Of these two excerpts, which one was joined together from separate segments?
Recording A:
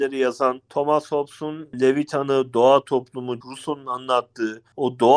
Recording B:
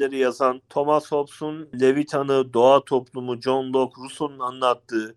A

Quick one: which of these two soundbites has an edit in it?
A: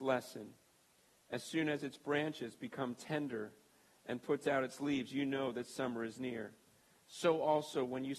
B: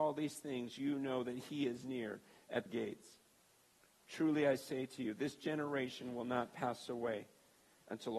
B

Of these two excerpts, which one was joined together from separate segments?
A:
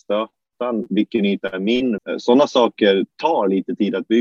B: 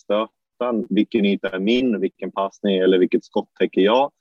A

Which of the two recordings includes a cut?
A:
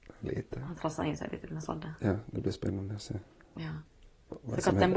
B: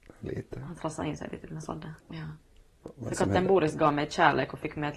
B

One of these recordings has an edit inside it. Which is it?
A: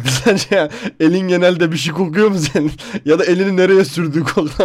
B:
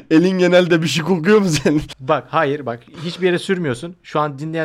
B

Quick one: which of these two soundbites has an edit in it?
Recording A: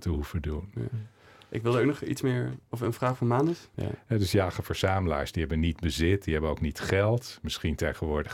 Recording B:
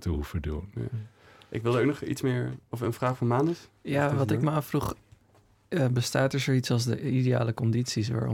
A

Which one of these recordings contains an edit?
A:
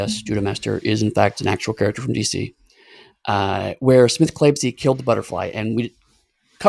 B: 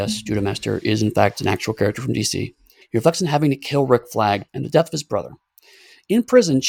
B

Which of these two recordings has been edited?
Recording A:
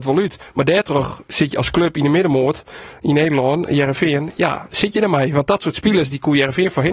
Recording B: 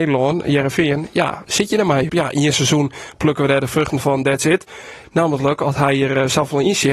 B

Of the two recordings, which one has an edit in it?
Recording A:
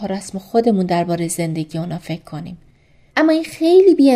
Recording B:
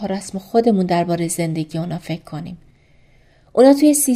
A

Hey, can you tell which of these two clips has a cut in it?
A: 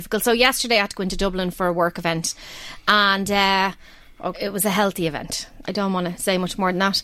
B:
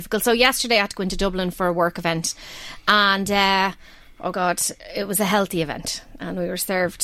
A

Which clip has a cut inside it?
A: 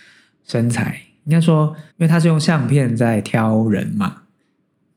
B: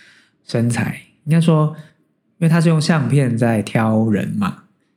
A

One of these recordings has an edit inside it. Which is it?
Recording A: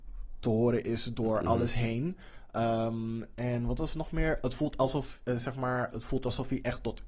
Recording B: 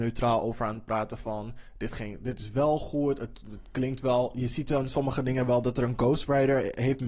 A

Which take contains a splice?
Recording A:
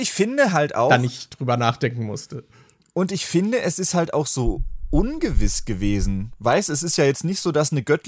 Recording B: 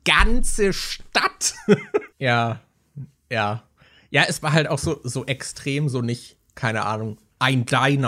B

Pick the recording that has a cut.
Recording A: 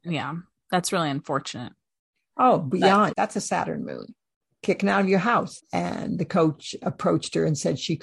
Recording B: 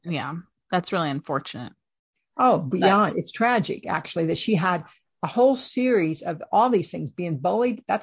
A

